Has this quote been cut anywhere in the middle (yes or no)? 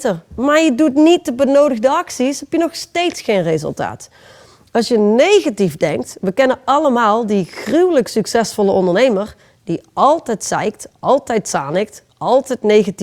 no